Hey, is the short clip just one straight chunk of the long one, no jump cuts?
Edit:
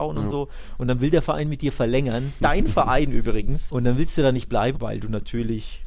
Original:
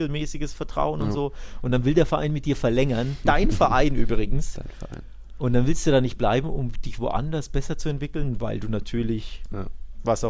no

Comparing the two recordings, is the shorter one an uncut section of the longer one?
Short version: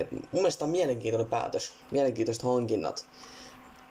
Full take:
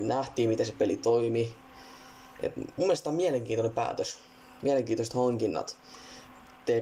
no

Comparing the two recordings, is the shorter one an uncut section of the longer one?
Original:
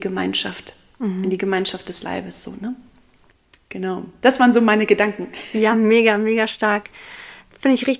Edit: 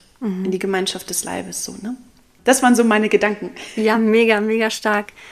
no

